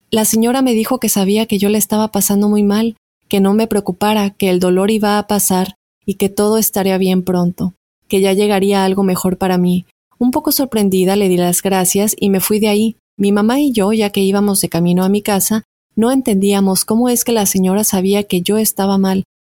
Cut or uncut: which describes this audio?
uncut